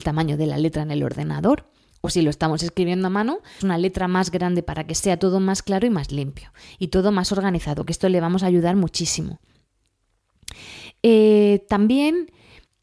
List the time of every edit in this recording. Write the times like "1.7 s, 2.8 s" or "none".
3.6 s